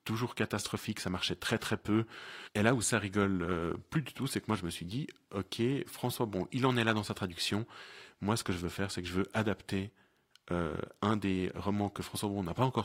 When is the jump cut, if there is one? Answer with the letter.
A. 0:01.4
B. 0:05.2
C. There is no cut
C